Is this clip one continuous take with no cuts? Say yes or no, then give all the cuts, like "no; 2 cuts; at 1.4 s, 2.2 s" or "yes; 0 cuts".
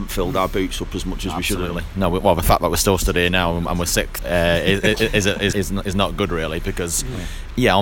no; 2 cuts; at 4.2 s, 5.5 s